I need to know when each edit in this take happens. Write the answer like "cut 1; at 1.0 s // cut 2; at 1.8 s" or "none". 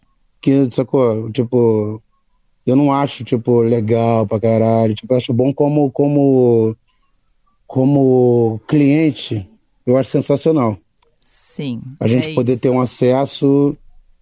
none